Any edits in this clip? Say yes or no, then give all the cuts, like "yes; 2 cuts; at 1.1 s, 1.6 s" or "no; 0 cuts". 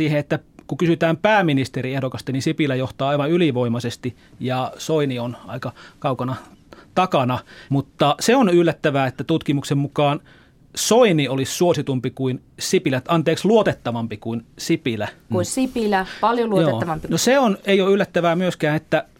yes; 3 cuts; at 7.7 s, 15.3 s, 17.1 s